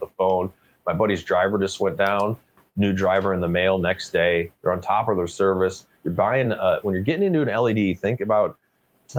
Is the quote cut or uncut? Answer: uncut